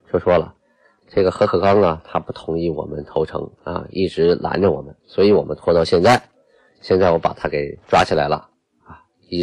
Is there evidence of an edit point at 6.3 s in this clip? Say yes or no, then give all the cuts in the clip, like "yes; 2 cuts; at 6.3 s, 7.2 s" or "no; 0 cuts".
no; 2 cuts; at 3.5 s, 5.0 s